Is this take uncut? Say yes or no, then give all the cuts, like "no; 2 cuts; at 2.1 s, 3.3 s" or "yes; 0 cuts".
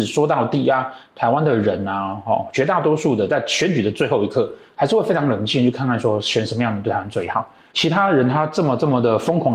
yes; 0 cuts